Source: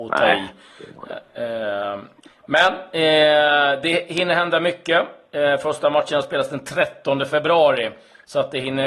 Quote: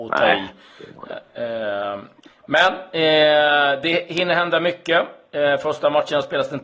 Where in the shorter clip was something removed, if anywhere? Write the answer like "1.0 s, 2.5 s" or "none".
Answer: none